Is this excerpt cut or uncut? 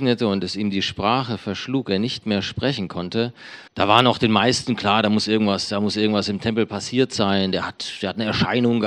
cut